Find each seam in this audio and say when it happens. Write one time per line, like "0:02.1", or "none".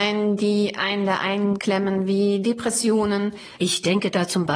0:03.6

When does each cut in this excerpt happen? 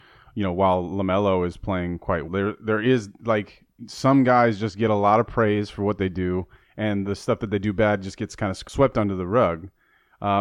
0:02.3
0:03.8

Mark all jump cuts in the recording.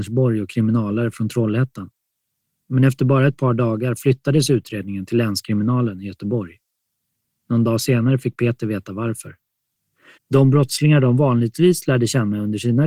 0:10.2

